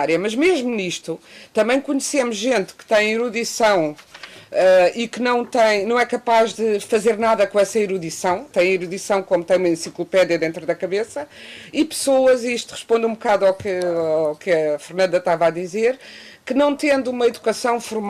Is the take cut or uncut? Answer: cut